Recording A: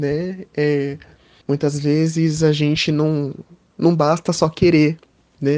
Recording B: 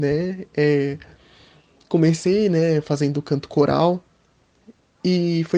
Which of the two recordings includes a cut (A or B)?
A